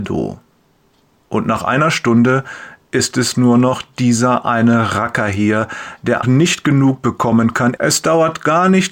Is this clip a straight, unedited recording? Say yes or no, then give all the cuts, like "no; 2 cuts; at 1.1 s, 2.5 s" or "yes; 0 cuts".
no; 2 cuts; at 6.2 s, 7.8 s